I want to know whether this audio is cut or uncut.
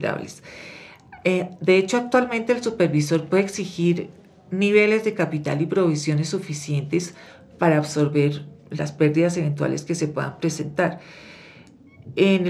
uncut